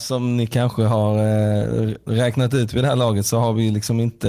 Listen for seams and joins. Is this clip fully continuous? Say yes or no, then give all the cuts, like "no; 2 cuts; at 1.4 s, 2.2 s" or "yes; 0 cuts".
yes; 0 cuts